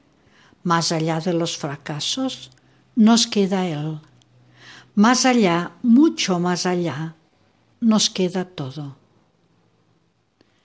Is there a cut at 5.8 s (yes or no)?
no